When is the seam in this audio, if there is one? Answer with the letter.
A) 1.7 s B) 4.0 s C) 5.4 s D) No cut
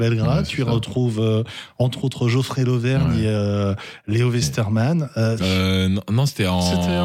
C